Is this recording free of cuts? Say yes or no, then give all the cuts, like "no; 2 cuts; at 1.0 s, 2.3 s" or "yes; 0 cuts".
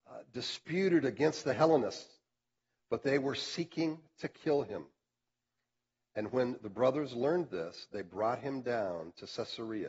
yes; 0 cuts